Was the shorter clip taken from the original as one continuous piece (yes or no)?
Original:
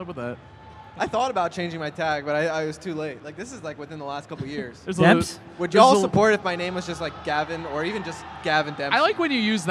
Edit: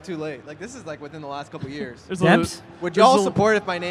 yes